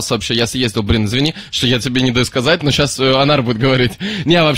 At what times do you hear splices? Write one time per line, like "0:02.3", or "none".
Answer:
none